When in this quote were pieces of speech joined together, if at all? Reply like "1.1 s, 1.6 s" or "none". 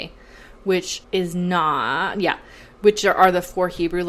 1.0 s